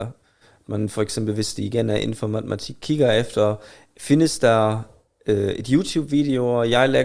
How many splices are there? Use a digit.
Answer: 0